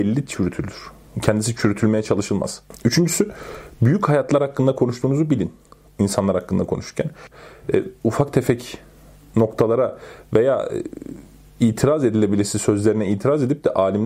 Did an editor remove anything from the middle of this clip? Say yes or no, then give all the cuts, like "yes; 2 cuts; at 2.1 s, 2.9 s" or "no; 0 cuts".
no; 0 cuts